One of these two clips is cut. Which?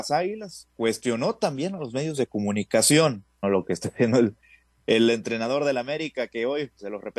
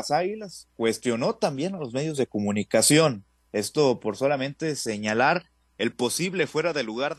first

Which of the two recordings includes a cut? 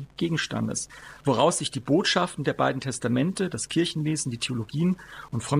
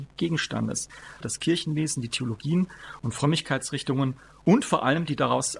second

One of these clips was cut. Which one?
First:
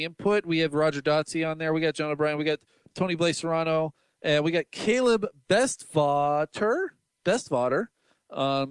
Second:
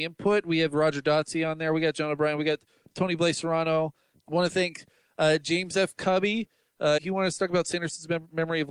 second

